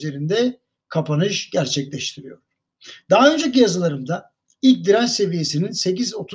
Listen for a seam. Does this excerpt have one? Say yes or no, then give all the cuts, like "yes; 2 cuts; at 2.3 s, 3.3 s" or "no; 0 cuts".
no; 0 cuts